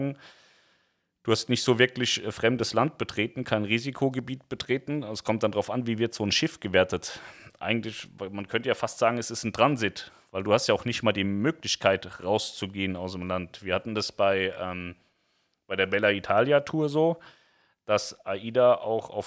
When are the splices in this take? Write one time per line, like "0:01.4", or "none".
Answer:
none